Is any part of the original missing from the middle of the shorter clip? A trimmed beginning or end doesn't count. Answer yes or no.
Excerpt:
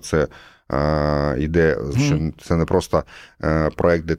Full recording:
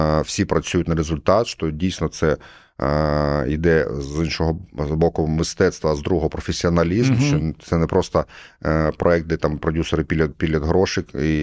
yes